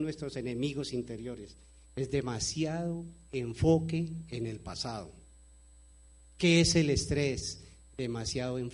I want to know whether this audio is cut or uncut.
cut